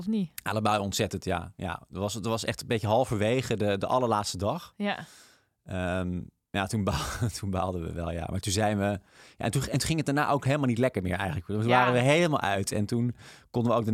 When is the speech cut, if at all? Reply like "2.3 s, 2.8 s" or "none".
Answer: none